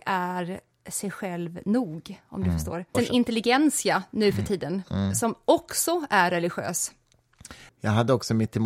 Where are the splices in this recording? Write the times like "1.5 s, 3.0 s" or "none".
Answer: 2.9 s, 7.7 s